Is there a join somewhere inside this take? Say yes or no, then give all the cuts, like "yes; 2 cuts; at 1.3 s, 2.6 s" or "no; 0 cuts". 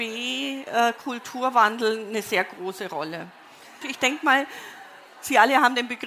yes; 1 cut; at 3.8 s